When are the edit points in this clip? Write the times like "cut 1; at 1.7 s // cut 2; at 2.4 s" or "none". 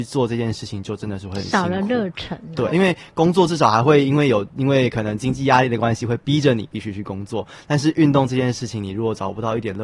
cut 1; at 2.7 s